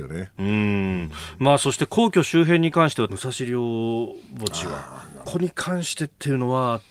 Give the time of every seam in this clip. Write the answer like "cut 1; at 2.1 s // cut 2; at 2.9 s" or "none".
cut 1; at 3.1 s // cut 2; at 5.2 s